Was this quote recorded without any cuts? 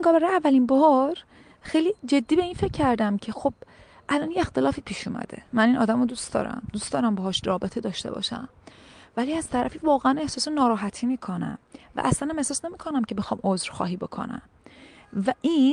yes; 0 cuts

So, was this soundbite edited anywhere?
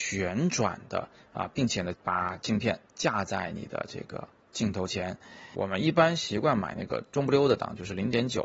yes; 2 cuts; at 1.9 s, 5.5 s

